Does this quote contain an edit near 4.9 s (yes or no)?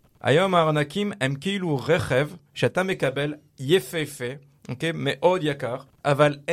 no